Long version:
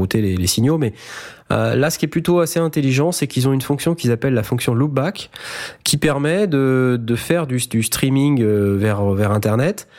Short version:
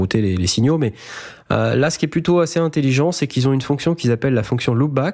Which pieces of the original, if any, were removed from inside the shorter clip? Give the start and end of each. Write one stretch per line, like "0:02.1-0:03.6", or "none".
none